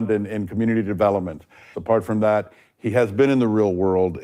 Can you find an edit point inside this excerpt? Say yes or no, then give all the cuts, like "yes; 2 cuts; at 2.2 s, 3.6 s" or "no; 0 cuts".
yes; 1 cut; at 1.7 s